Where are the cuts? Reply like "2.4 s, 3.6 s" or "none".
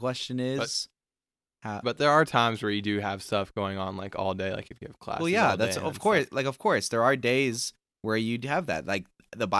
1.8 s